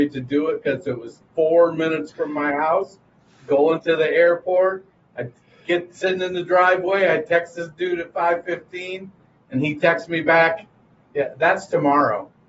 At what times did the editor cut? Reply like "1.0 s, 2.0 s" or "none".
none